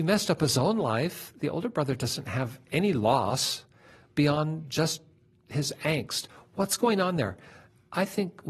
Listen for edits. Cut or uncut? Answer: uncut